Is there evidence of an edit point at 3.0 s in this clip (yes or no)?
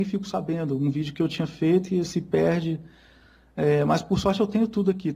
no